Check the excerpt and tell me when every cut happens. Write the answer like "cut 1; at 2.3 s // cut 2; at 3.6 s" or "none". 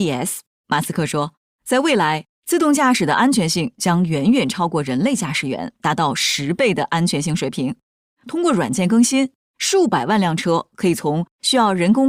none

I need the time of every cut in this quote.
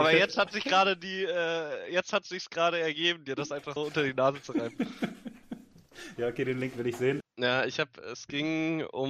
cut 1; at 3.8 s // cut 2; at 7.2 s

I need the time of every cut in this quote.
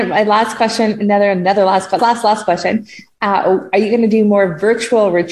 cut 1; at 2.0 s

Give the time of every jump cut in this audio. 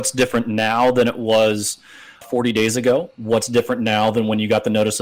cut 1; at 2.2 s

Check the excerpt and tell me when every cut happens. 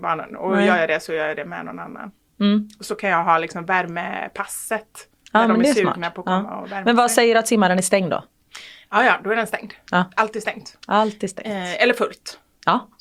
none

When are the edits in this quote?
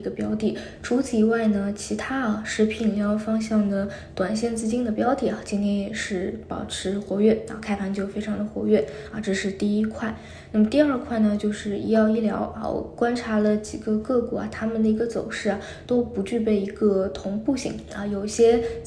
none

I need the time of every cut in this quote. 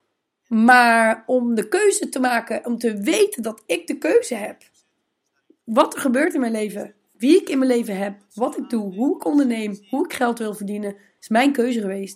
cut 1; at 11.2 s

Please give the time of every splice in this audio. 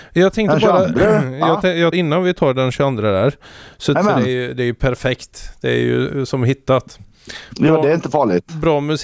cut 1; at 1.9 s // cut 2; at 4.0 s

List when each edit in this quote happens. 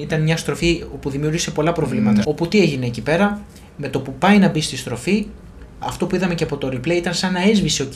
cut 1; at 2.2 s // cut 2; at 5.8 s

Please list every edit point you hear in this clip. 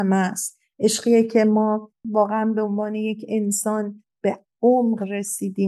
cut 1; at 2.0 s

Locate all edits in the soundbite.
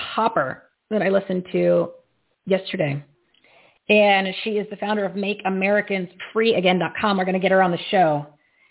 none

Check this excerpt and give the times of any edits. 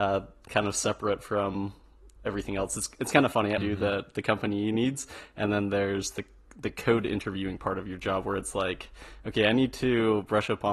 cut 1; at 3.6 s

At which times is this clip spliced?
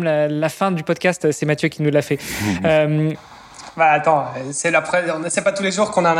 none

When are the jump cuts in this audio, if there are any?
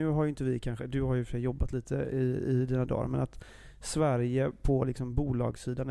none

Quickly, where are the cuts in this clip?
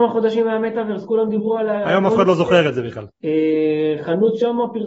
cut 1; at 3.1 s

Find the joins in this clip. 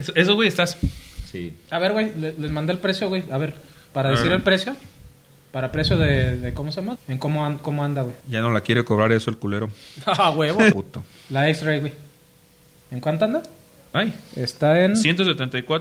cut 1; at 7.0 s // cut 2; at 8.2 s // cut 3; at 10.7 s

